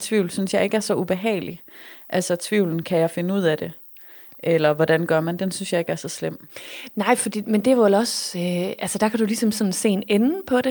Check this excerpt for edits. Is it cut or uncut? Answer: uncut